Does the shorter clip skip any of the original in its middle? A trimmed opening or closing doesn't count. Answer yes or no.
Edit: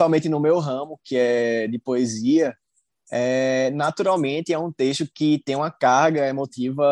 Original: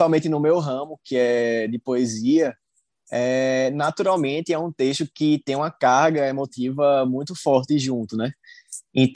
no